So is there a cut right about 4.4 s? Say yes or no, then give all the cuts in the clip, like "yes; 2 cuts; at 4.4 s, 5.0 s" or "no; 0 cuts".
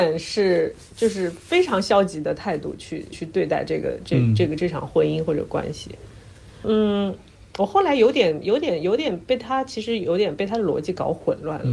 no; 2 cuts; at 3.1 s, 6.6 s